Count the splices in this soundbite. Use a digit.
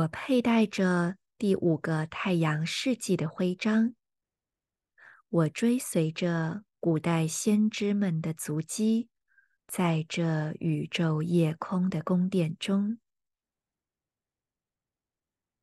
1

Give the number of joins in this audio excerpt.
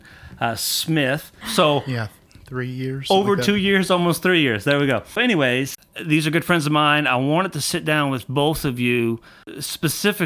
2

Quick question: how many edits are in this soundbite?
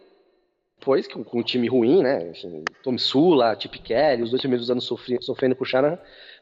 0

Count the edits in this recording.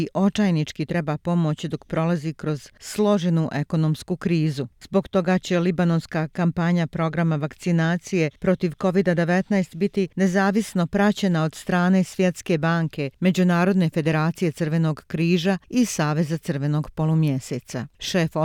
1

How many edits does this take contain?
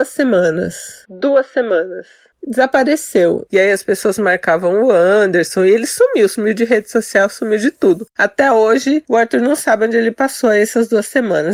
1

